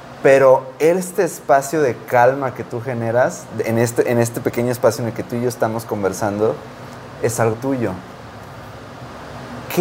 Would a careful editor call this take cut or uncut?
cut